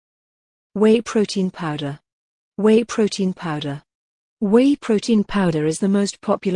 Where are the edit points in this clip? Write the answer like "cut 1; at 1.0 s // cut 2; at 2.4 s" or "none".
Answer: none